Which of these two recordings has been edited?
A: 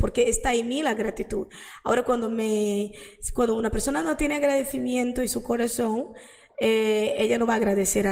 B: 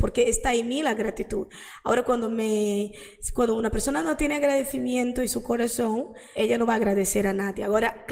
B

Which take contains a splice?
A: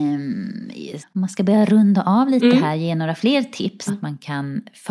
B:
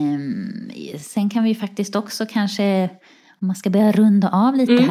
A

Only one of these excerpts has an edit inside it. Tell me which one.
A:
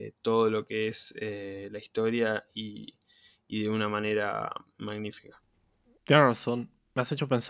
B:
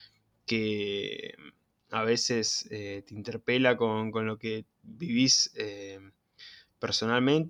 B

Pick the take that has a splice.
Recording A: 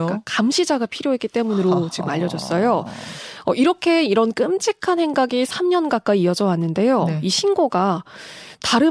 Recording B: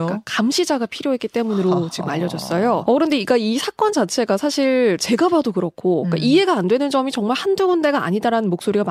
B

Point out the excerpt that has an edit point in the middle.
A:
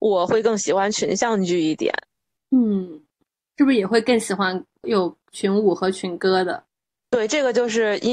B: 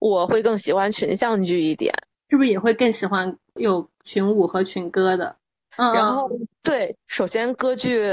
B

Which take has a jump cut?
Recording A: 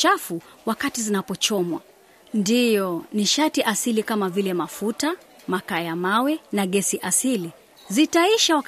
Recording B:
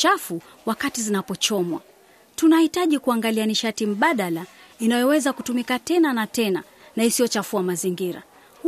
A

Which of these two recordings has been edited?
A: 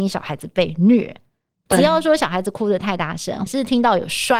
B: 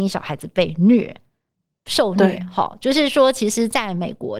A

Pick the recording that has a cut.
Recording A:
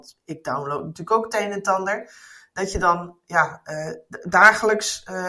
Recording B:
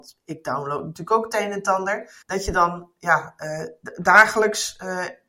B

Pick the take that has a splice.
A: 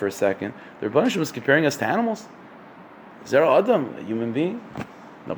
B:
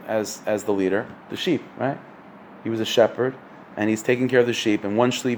B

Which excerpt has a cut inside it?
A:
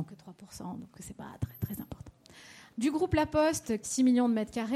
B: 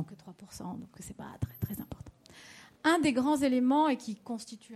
A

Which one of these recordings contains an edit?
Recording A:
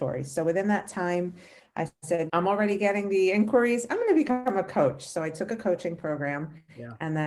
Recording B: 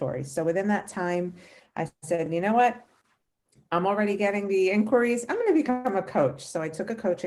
A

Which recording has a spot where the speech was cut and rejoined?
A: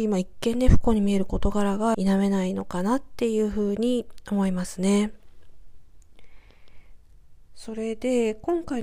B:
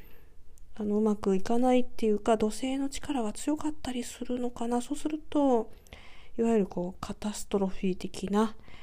A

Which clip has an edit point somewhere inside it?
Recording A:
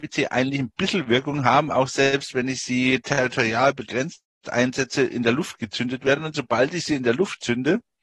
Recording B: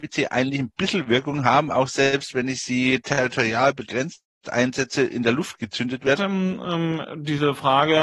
B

